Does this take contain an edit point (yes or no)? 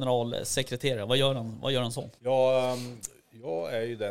yes